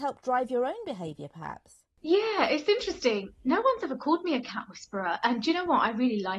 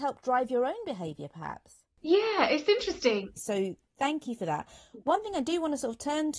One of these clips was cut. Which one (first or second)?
second